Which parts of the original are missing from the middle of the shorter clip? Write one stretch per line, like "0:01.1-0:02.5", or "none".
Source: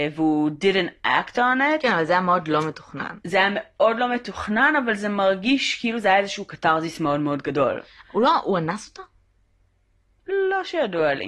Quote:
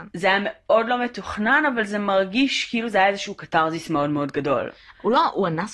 none